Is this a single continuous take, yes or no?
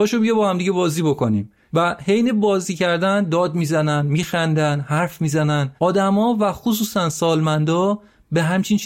no